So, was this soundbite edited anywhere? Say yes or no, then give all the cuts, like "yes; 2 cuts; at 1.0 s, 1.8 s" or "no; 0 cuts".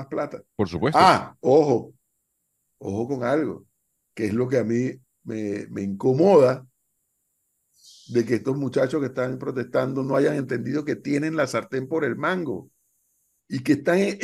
no; 0 cuts